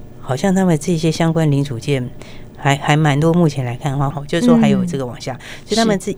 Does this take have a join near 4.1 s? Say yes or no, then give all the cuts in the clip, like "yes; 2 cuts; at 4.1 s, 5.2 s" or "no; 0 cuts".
yes; 1 cut; at 4.1 s